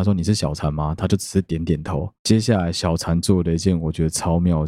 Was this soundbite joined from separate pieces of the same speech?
no; 0 cuts

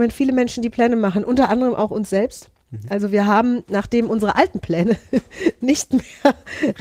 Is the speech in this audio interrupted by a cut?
no; 0 cuts

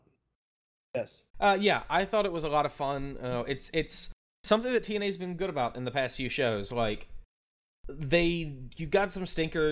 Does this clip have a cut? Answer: yes; 1 cut; at 1.3 s

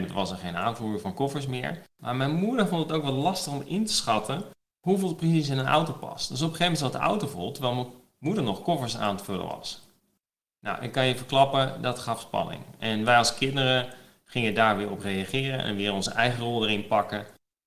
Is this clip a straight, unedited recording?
no; 1 cut; at 1.9 s

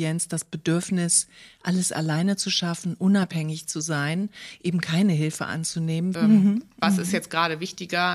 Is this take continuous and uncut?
no; 1 cut; at 6.2 s

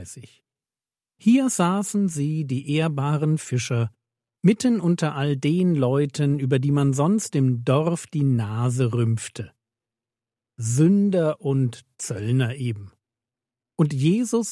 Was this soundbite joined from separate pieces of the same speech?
yes; 1 cut; at 1.1 s

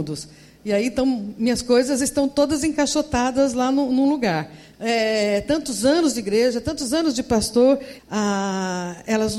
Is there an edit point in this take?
yes; 2 cuts; at 4.7 s, 8.0 s

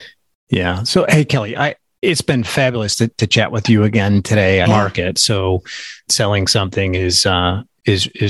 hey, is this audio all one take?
no; 2 cuts; at 4.6 s, 6.1 s

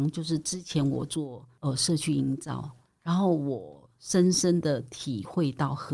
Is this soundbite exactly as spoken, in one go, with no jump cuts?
yes; 0 cuts

